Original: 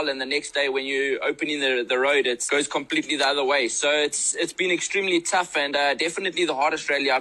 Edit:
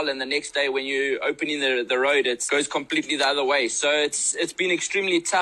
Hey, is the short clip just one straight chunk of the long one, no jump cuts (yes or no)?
yes